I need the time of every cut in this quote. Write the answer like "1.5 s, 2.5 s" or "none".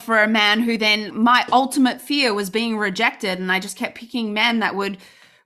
1.1 s